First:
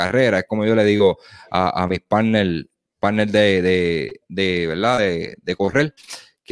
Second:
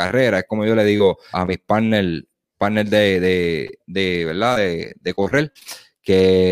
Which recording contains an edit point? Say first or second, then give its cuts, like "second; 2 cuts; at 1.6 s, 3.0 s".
second; 1 cut; at 1.3 s